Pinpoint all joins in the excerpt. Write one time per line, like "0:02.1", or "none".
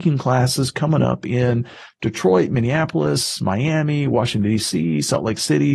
none